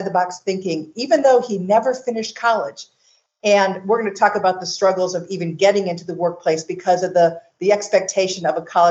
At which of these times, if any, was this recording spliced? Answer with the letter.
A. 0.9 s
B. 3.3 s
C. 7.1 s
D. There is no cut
D